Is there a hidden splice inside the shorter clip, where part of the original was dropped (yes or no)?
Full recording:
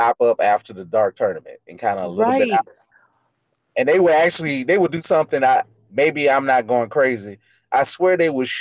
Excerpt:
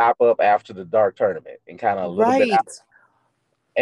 no